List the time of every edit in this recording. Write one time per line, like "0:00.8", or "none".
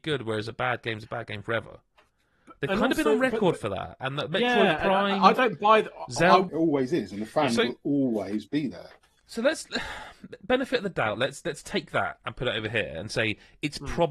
0:06.5